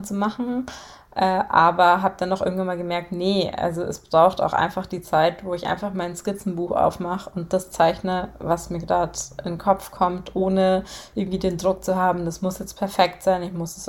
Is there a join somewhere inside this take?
no; 0 cuts

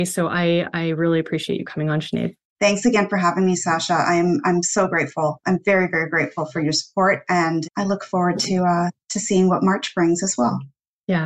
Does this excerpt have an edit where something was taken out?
yes; 2 cuts; at 7.6 s, 9.0 s

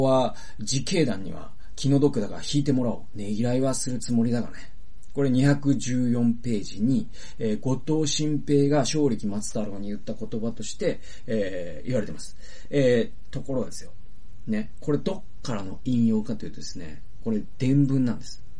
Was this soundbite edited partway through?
no; 0 cuts

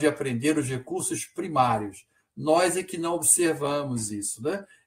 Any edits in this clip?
no; 0 cuts

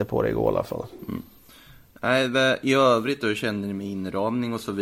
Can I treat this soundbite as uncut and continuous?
yes; 0 cuts

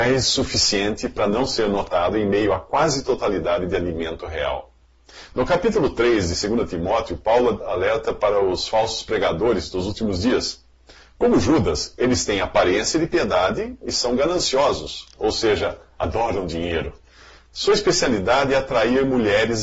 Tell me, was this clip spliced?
no; 0 cuts

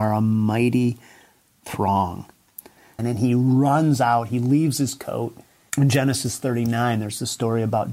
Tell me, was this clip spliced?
yes; 2 cuts; at 3.0 s, 5.7 s

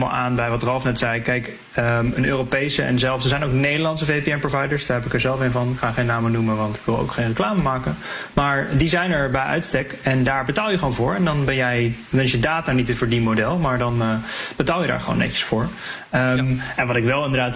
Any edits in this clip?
no; 0 cuts

